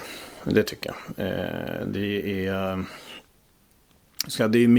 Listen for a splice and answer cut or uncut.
uncut